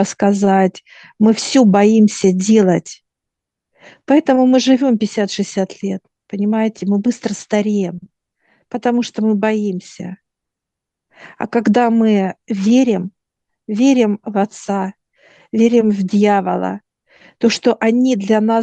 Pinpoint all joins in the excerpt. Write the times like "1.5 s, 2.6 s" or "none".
none